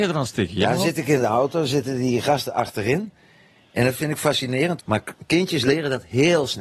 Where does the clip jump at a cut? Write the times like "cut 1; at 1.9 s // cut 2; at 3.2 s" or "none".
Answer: cut 1; at 4.8 s